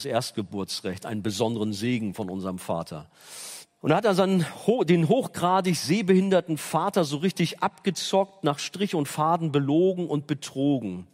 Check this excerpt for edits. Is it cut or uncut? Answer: cut